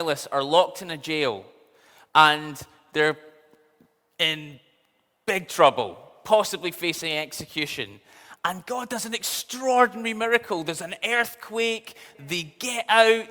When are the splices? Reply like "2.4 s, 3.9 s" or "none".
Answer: 12.1 s